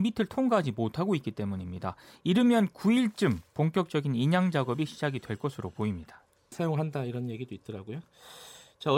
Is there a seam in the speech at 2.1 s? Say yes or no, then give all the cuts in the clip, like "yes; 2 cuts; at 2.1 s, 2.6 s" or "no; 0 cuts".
no; 1 cut; at 6.5 s